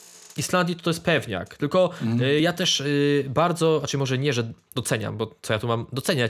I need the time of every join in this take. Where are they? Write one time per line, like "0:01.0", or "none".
none